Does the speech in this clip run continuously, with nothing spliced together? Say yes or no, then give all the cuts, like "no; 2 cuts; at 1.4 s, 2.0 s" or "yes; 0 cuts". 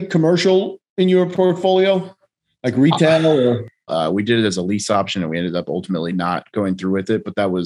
no; 1 cut; at 3.9 s